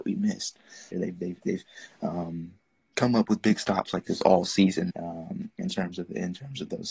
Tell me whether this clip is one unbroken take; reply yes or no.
no